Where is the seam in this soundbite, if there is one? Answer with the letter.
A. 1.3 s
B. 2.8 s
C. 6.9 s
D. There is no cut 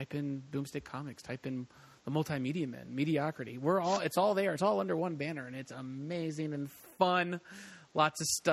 D